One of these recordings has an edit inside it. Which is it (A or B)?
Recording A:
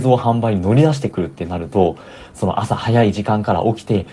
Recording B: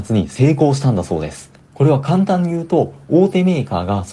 B